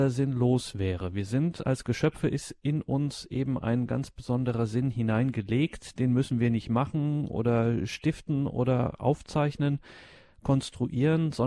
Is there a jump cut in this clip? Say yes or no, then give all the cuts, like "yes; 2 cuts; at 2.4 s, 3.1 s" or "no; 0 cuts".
no; 0 cuts